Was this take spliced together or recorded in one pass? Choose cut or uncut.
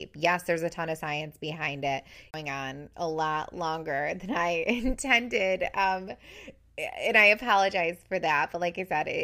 cut